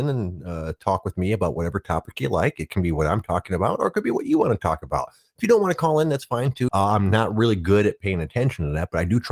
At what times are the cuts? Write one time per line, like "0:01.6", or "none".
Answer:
0:06.7